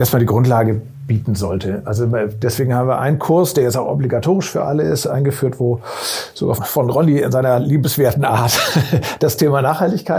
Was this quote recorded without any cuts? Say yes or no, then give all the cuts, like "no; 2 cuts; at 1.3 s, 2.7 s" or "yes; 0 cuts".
no; 1 cut; at 6.6 s